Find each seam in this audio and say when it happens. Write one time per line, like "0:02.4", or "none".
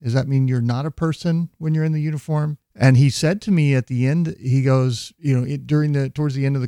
0:02.6